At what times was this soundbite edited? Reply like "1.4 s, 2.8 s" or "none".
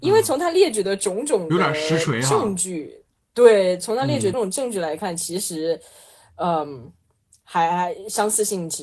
4.3 s